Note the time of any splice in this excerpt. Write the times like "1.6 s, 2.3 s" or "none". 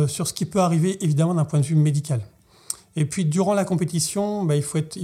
none